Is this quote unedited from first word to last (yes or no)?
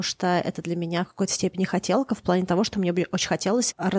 yes